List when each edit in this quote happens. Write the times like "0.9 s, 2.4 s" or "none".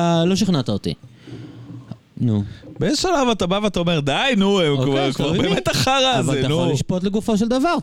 2.0 s